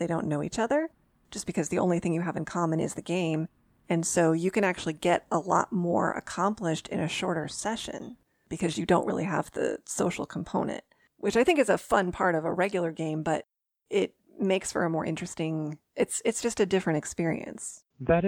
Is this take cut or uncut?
uncut